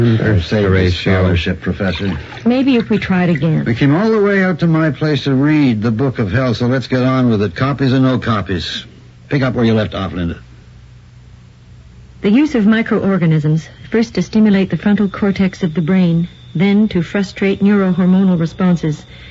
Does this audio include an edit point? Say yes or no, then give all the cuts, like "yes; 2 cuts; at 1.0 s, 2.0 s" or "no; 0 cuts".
no; 0 cuts